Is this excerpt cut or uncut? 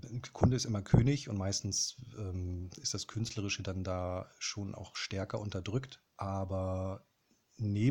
uncut